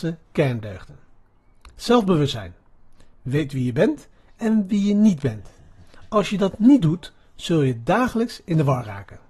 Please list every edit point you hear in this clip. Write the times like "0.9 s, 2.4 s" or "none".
none